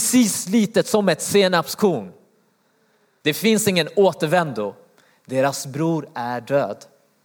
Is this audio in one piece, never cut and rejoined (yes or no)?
no